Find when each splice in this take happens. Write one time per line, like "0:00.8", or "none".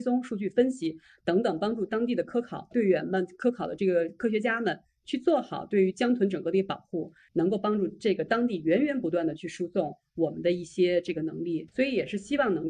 0:07.3